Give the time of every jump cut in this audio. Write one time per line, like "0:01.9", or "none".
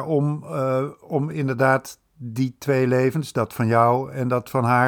none